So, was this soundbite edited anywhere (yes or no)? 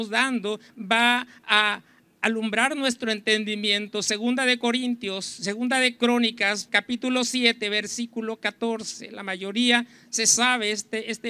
yes